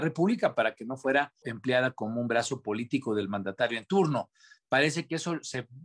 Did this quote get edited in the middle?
yes; 1 cut; at 1.4 s

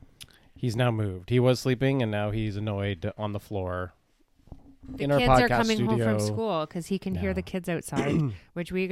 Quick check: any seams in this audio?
no; 0 cuts

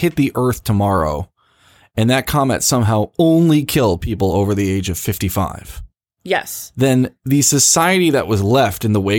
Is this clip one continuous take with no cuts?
yes; 0 cuts

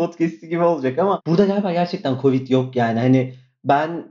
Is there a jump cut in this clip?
no; 0 cuts

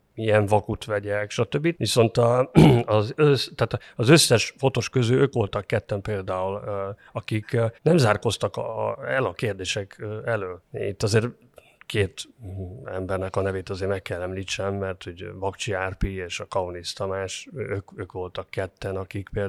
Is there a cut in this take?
yes; 3 cuts; at 1.8 s, 7.8 s, 10.6 s

